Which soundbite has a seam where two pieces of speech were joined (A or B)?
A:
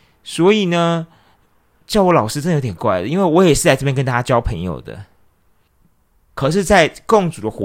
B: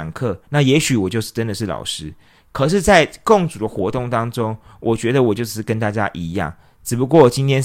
A